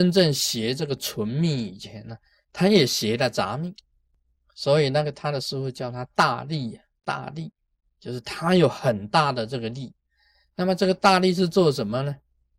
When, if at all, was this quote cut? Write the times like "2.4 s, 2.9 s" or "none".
none